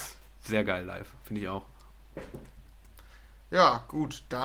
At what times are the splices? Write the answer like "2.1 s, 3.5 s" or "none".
none